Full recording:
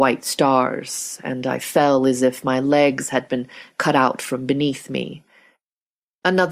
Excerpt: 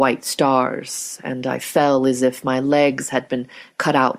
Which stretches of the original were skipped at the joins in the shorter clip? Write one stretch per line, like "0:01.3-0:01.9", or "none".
none